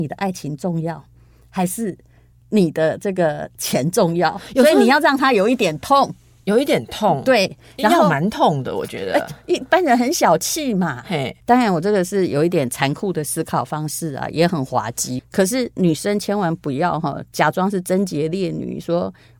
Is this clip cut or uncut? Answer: cut